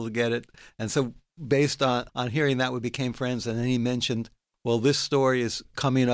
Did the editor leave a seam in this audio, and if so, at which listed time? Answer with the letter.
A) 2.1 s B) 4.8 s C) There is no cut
A